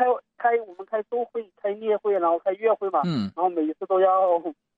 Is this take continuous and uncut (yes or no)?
yes